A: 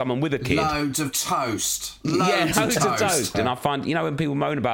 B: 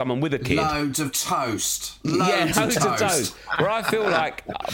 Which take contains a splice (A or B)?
A